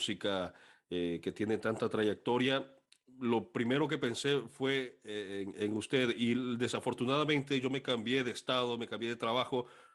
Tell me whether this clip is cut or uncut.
uncut